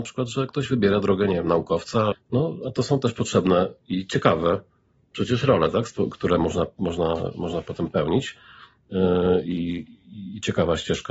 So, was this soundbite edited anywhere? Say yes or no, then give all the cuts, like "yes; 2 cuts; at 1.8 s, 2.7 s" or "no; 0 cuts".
yes; 1 cut; at 2.1 s